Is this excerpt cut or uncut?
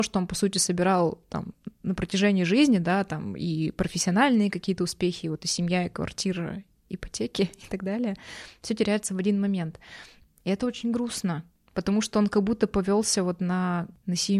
uncut